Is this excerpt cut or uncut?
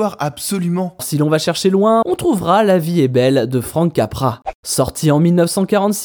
cut